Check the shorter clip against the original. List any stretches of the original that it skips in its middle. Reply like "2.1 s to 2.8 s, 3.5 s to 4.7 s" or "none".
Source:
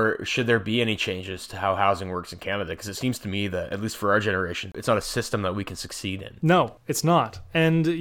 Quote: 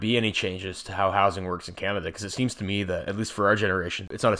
none